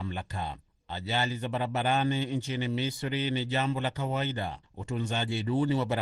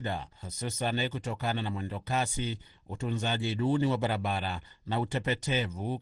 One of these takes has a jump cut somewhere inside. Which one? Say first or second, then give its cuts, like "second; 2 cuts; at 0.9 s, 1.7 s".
first; 1 cut; at 4.6 s